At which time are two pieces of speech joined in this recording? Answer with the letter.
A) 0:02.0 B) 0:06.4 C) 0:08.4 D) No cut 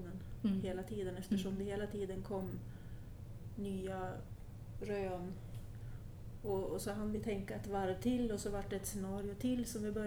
D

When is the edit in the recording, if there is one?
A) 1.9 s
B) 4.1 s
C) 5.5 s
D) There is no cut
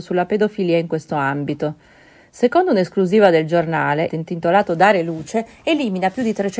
B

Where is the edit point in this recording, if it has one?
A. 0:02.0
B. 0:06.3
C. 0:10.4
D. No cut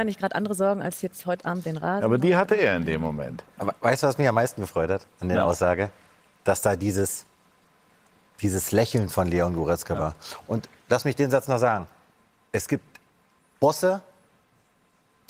C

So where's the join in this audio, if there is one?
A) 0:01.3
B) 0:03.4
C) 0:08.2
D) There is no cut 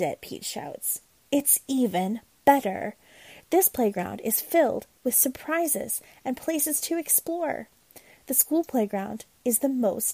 D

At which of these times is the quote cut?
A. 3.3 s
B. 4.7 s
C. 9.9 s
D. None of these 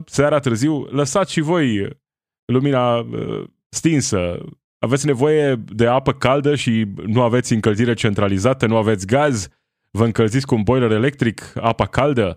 B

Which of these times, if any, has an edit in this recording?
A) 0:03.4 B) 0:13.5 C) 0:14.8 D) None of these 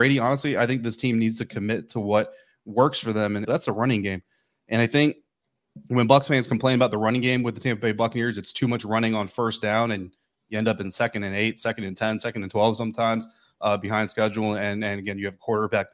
A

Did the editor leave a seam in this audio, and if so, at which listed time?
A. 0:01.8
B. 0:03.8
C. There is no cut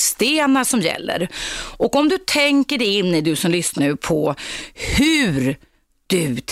B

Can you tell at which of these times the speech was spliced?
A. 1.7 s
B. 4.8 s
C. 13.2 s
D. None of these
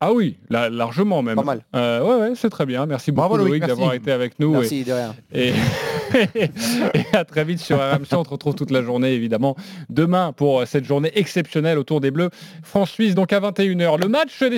D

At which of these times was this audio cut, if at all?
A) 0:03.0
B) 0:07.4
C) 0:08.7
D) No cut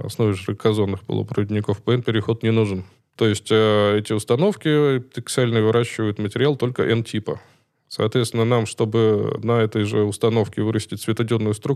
A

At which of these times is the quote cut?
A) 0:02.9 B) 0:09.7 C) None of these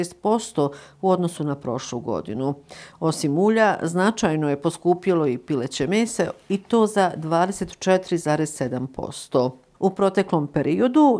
B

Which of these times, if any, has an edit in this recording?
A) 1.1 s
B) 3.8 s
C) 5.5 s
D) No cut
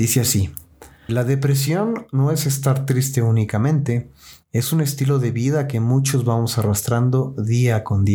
A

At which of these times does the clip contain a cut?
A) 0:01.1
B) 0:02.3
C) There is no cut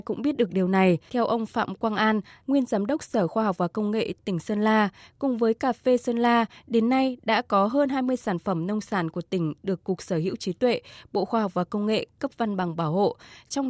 A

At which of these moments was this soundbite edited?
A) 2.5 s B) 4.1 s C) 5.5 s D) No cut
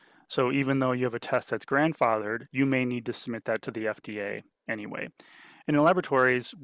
A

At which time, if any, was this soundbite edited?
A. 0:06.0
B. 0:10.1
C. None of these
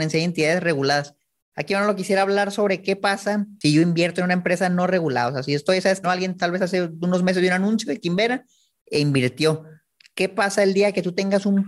A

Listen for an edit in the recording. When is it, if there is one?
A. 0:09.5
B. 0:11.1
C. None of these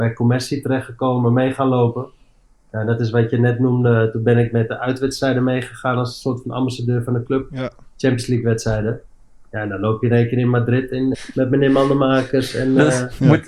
B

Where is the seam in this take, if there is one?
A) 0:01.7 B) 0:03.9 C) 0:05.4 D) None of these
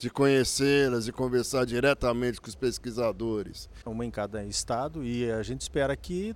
B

